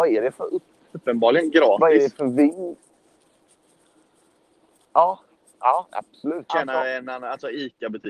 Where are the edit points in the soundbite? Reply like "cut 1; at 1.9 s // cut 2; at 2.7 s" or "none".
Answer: cut 1; at 6.5 s